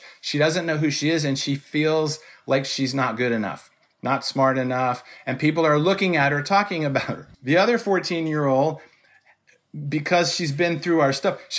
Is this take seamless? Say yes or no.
no